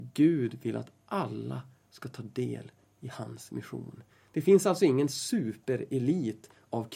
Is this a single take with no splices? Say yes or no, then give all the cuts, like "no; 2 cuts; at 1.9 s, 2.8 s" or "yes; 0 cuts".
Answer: yes; 0 cuts